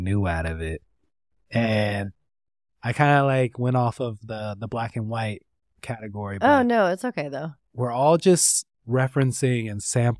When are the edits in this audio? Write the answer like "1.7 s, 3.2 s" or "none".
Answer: 7.6 s, 8.7 s